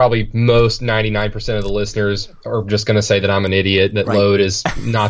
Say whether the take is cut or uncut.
uncut